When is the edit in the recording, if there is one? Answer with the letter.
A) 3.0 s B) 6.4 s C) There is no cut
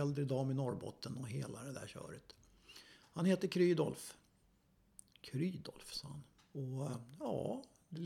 B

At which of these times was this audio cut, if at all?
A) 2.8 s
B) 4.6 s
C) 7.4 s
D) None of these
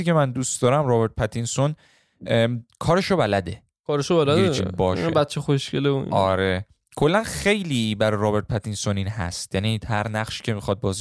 B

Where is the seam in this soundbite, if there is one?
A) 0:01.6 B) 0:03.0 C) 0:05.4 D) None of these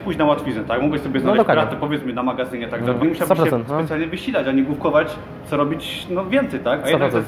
B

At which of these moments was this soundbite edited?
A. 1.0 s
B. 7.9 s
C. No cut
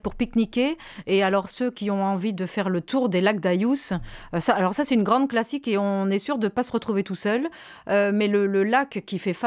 C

